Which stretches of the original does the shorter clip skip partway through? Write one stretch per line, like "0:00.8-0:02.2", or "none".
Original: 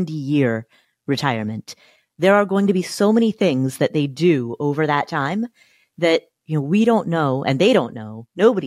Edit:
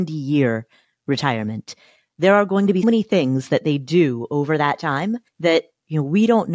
0:02.8-0:03.1
0:05.6-0:05.9